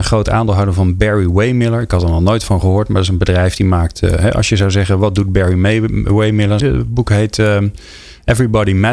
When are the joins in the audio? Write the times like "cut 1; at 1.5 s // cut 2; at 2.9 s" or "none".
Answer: cut 1; at 6.6 s